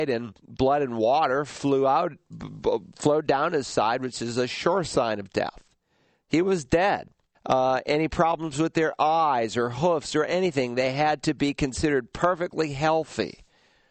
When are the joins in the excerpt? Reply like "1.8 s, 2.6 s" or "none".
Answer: 7.3 s